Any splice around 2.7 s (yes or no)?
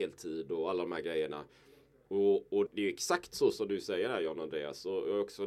yes